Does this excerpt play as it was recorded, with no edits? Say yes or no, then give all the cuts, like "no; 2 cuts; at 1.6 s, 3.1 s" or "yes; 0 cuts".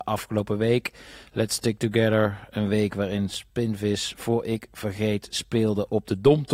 yes; 0 cuts